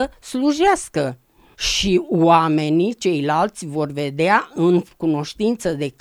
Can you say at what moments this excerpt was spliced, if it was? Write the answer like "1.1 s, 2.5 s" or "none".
1.5 s